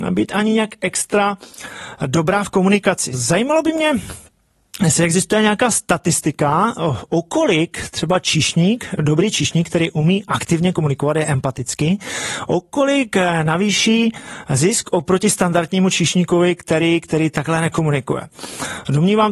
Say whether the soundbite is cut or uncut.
cut